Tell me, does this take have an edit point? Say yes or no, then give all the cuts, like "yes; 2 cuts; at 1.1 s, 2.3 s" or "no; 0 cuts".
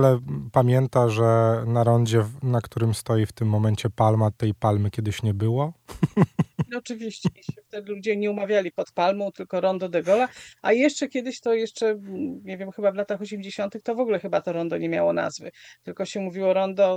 no; 0 cuts